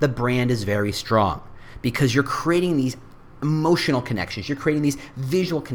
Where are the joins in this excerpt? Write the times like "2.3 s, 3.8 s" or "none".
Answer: none